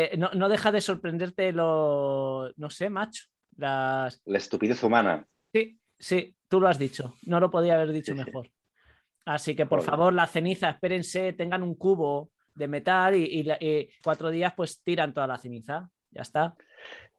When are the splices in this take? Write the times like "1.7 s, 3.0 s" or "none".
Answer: 14.0 s